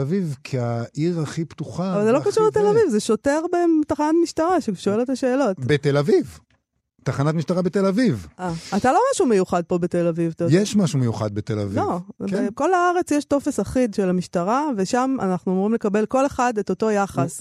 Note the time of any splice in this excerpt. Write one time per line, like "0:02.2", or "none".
none

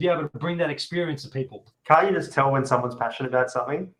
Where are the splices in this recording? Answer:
none

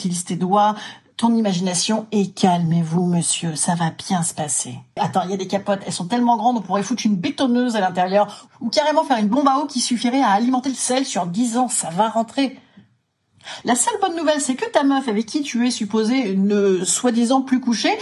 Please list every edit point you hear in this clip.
0:05.0
0:13.6

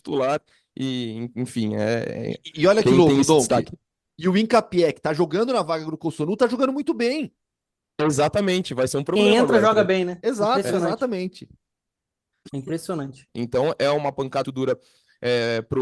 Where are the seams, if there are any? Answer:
0:13.3
0:14.4

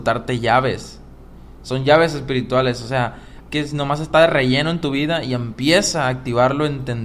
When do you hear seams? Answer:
0:03.4

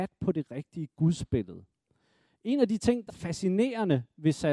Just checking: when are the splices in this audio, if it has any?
0:03.1

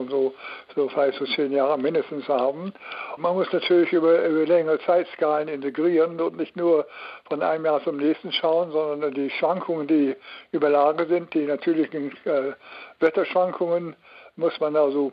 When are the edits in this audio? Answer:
0:03.2

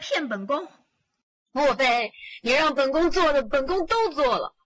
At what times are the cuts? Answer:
none

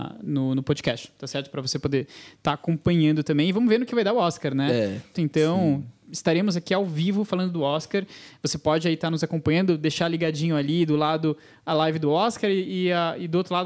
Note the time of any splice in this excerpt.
0:05.1

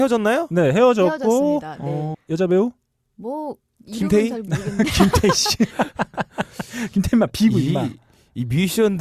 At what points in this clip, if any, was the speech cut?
0:02.1

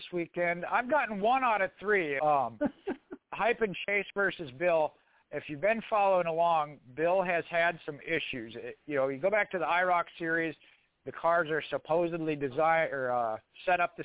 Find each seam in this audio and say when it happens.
0:02.2

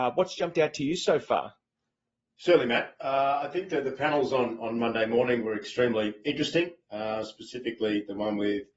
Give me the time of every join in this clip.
none

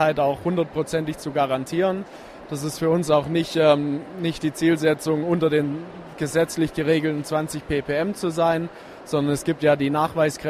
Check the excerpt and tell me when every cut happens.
none

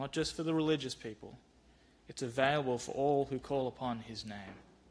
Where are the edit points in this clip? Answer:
none

